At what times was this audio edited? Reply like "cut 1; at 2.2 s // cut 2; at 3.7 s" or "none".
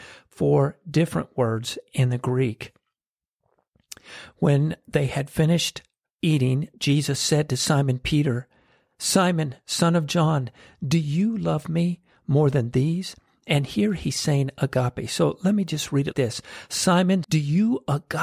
cut 1; at 16.1 s // cut 2; at 17.2 s